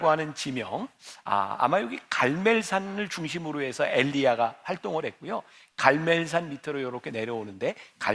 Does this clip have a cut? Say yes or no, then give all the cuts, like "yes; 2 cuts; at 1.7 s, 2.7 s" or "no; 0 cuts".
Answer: no; 0 cuts